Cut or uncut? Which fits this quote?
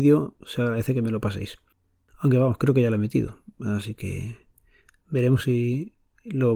uncut